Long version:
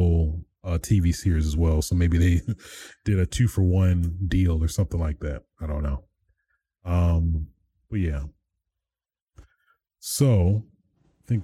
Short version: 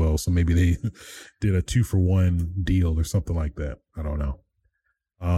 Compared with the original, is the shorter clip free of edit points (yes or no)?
yes